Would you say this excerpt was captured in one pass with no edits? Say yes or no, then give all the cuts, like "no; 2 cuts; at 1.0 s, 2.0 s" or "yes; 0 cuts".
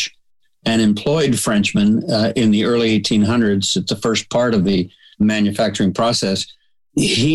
yes; 0 cuts